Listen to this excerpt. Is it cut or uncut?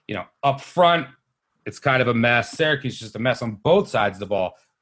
cut